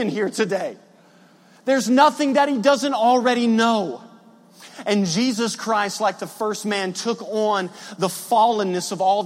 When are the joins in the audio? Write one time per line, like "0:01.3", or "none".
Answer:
none

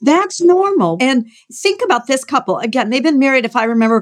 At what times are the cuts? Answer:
0:01.0

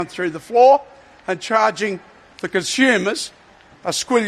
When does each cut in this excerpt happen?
none

